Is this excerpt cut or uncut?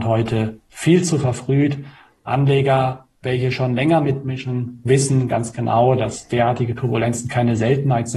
uncut